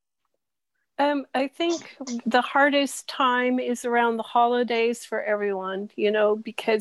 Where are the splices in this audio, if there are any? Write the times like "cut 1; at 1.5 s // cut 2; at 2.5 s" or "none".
cut 1; at 2.2 s